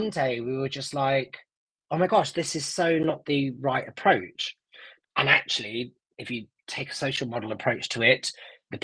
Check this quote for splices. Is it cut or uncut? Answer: cut